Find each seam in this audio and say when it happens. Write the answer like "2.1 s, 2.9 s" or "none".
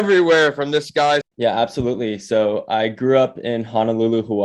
1.2 s